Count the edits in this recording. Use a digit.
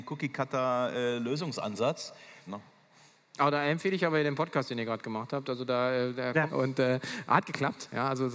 2